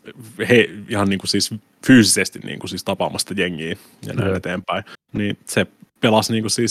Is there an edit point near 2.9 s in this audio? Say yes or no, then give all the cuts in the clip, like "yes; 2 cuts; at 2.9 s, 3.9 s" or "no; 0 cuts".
no; 1 cut; at 4.9 s